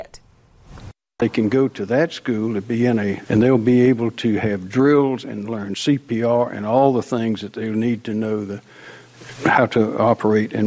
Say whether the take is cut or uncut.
cut